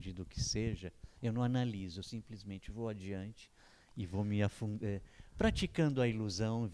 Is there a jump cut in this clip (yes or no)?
no